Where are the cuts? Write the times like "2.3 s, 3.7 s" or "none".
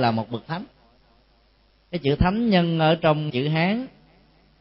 3.3 s